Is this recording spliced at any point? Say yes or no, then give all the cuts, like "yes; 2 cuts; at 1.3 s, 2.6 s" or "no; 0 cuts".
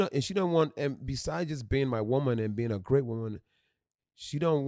no; 0 cuts